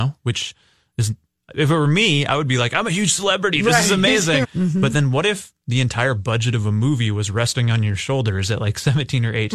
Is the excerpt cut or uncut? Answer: cut